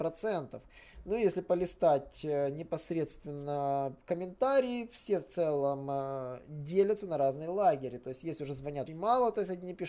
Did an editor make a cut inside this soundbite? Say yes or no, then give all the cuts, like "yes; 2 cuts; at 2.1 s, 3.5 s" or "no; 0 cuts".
yes; 1 cut; at 8.9 s